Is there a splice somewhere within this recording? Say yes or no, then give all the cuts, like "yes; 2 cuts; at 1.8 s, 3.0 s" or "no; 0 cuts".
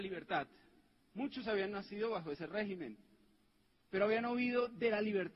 no; 0 cuts